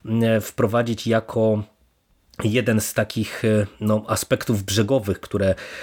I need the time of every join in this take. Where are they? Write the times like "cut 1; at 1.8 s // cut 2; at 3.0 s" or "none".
none